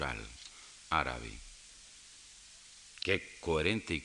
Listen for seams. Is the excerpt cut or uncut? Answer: cut